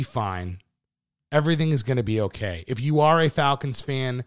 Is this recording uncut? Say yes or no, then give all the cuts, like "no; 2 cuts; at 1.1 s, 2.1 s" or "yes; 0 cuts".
yes; 0 cuts